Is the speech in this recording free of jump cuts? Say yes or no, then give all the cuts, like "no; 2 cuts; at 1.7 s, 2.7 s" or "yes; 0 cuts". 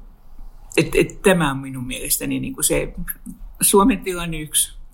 yes; 0 cuts